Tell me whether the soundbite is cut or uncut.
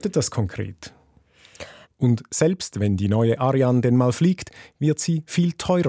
cut